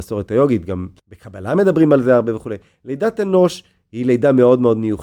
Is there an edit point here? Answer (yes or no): yes